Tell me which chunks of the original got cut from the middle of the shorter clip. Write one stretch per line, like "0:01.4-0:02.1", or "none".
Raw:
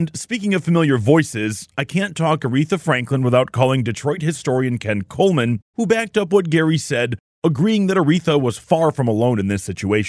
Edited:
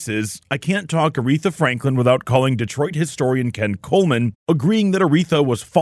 0:05.7-0:07.3